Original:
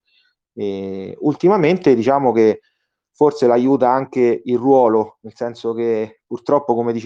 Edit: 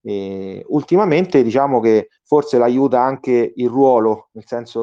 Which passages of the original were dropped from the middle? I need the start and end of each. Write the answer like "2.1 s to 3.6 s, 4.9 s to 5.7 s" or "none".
2.7 s to 3.1 s